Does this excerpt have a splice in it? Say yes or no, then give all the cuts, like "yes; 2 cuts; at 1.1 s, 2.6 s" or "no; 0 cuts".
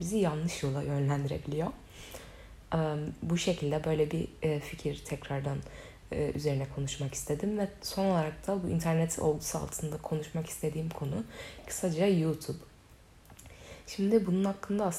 no; 0 cuts